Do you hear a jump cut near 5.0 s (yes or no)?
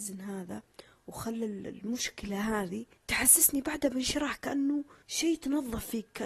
yes